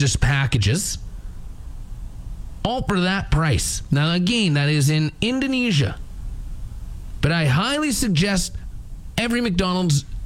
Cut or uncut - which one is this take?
uncut